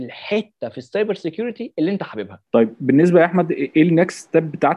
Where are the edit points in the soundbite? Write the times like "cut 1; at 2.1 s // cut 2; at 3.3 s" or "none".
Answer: cut 1; at 2.5 s